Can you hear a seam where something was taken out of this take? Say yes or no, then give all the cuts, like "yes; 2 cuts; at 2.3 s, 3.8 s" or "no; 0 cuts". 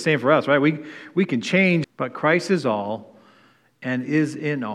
yes; 1 cut; at 1.8 s